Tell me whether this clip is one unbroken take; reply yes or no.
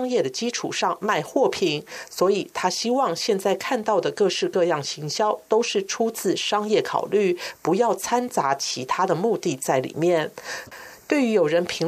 no